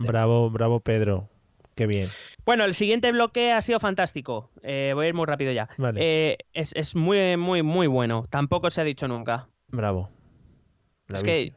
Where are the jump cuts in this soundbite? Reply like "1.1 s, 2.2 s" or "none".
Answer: 2.3 s, 9.7 s

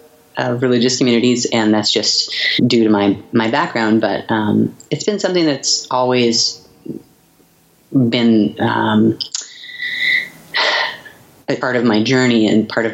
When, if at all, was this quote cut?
2.6 s, 11.6 s

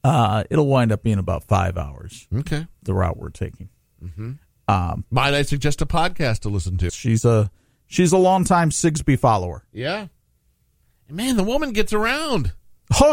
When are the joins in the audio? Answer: 6.9 s

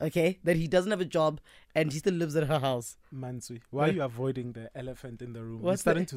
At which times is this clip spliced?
none

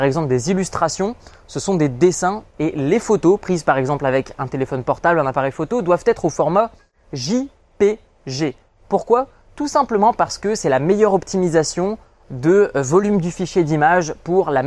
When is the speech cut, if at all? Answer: 2.5 s

